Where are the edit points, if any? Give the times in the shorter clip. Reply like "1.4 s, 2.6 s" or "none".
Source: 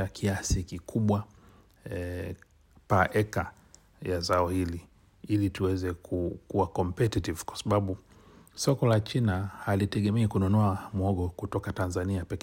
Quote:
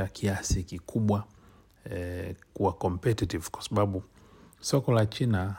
2.5 s